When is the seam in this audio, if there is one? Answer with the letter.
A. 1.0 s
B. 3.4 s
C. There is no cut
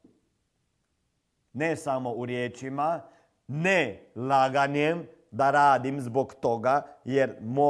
C